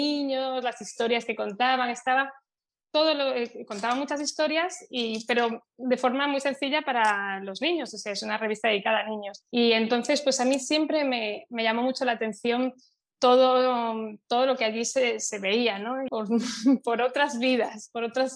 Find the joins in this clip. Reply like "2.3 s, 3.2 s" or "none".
9.4 s, 16.1 s